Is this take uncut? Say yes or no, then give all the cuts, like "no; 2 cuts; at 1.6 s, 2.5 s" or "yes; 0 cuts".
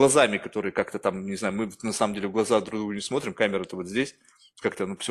yes; 0 cuts